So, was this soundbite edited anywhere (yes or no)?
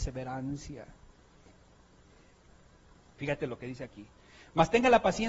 no